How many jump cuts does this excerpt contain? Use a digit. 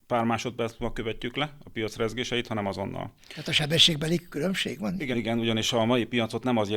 1